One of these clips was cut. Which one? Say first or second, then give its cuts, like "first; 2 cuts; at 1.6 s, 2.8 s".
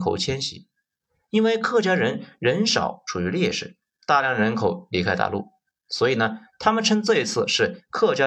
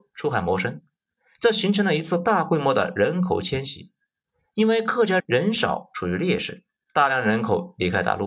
second; 1 cut; at 5.2 s